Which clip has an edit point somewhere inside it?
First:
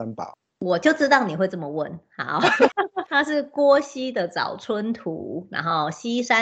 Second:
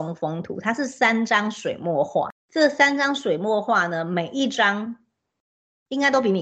first; 1 cut; at 2.7 s

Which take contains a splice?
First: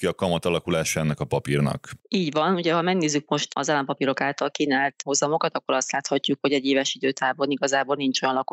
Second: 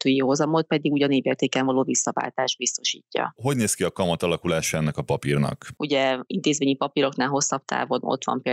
second; 2 cuts; at 3.4 s, 5.8 s

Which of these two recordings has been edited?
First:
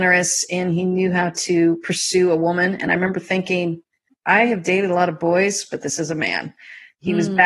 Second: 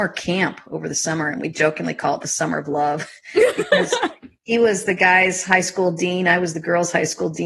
first; 1 cut; at 4.1 s

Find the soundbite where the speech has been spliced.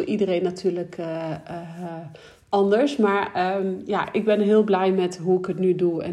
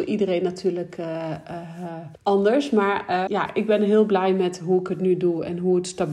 second; 2 cuts; at 2.2 s, 3.3 s

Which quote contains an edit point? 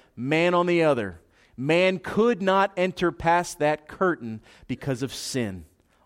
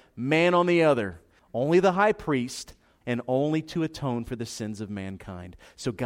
second; 2 cuts; at 1.4 s, 3.0 s

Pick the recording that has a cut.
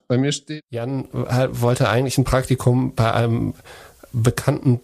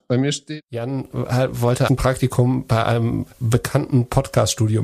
second; 2 cuts; at 1.9 s, 3.3 s

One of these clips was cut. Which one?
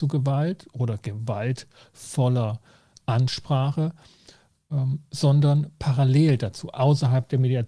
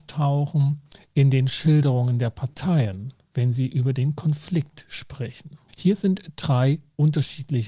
second; 1 cut; at 5.7 s

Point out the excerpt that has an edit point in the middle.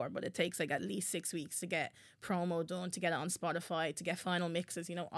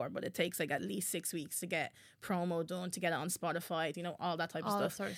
second; 1 cut; at 3.9 s

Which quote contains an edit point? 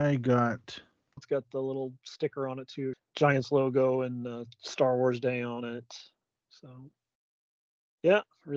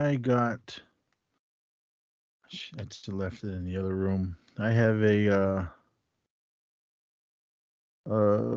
first; 2 cuts; at 1.2 s, 2.9 s

